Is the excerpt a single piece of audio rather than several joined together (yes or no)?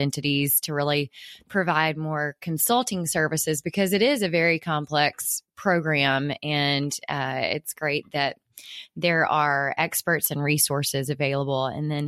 yes